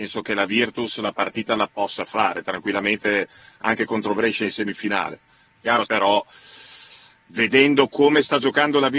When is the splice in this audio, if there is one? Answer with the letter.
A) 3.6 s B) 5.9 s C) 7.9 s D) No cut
B